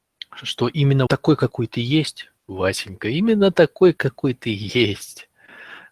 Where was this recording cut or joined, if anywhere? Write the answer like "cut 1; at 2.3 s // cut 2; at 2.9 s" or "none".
cut 1; at 1.1 s // cut 2; at 2.4 s